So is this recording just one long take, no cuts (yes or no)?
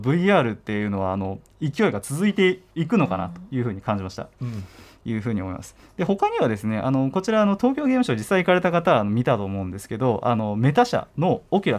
no